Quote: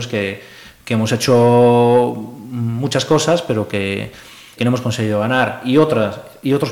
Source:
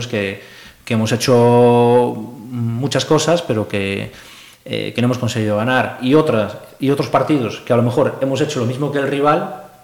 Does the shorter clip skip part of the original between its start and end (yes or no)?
yes